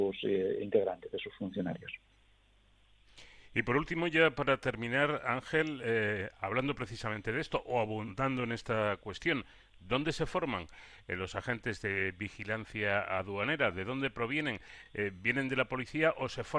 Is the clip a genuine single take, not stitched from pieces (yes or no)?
yes